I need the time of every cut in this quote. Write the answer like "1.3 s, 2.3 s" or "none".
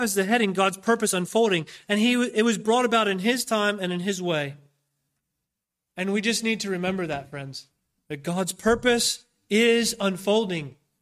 1.8 s